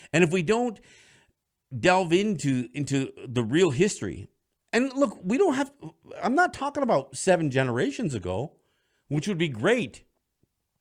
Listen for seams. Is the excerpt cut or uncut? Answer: uncut